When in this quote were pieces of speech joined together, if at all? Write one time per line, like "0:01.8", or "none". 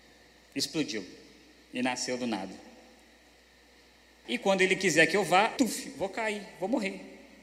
0:04.2
0:05.6